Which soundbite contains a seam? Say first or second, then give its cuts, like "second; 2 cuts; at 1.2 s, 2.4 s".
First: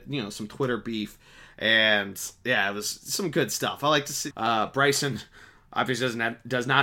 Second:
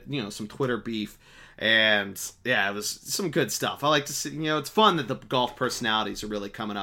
first; 1 cut; at 4.3 s